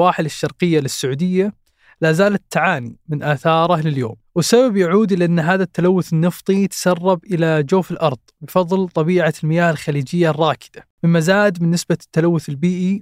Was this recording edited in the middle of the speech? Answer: yes; 1 cut; at 10.9 s

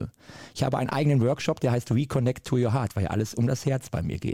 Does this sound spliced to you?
no; 0 cuts

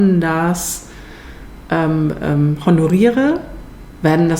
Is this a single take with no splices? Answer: yes; 0 cuts

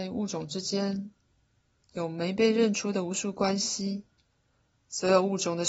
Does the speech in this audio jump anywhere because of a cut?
no; 0 cuts

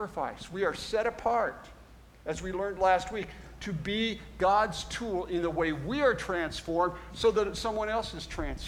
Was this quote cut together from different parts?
no; 0 cuts

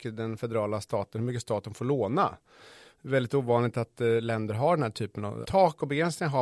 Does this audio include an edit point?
yes; 1 cut; at 5.4 s

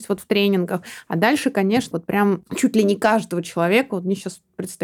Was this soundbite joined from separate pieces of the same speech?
yes; 1 cut; at 1.9 s

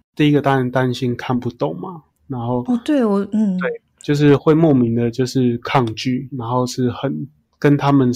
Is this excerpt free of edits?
no; 2 cuts; at 4.4 s, 6.3 s

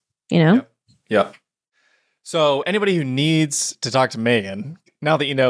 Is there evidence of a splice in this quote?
no; 0 cuts

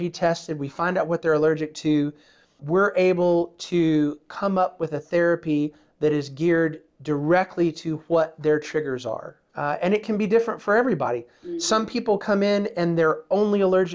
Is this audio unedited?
no; 2 cuts; at 2.6 s, 9.5 s

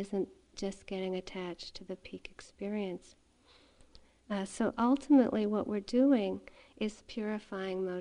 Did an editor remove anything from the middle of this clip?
no; 0 cuts

